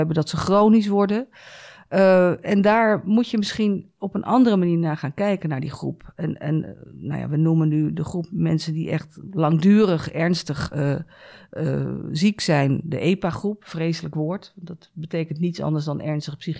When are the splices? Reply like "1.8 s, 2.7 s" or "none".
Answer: none

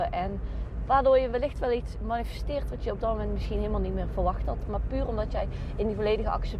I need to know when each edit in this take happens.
none

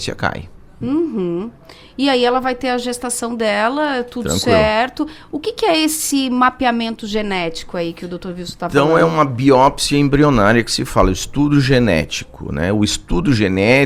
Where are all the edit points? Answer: none

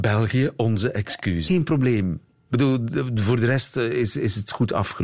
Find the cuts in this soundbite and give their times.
1.5 s

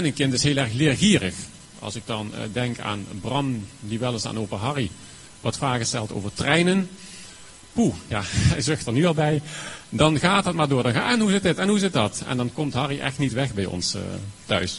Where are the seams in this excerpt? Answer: none

